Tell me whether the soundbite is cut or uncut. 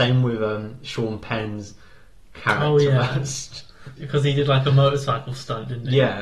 cut